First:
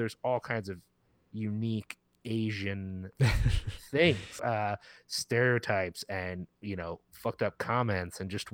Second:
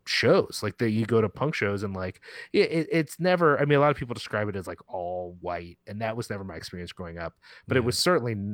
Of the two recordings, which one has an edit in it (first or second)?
first